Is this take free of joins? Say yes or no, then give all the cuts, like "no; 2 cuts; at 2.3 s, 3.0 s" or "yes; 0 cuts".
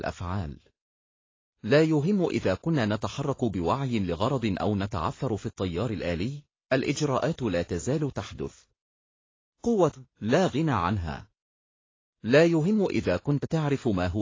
no; 1 cut; at 10.1 s